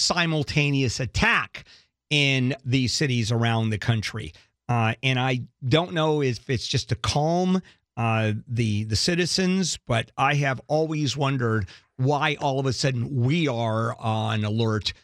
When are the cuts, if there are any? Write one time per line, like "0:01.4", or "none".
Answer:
none